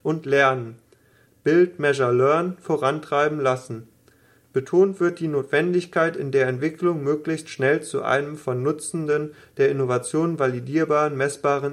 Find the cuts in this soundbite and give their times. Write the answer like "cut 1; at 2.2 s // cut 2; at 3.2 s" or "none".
none